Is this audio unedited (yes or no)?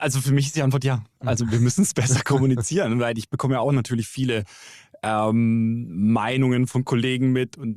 yes